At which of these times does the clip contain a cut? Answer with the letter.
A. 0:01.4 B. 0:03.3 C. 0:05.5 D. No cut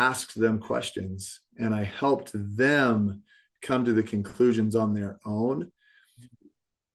D